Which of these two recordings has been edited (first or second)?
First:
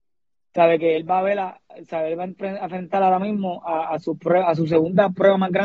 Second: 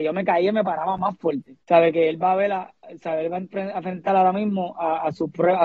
second